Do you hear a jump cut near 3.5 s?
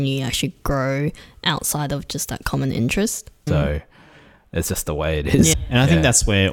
yes; 2 cuts; at 3.5 s, 5.5 s

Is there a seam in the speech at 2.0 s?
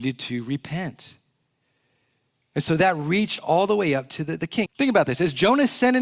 no; 1 cut; at 4.7 s

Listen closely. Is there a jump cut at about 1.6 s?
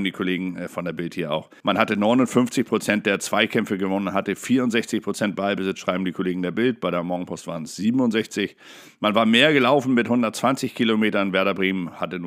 yes; 1 cut; at 1.6 s

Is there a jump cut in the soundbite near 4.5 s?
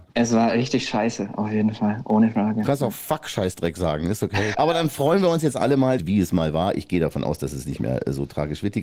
yes; 2 cuts; at 4.5 s, 6.0 s

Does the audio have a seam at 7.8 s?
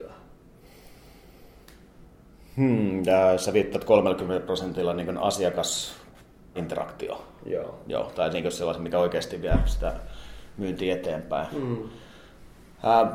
no; 1 cut; at 6.5 s

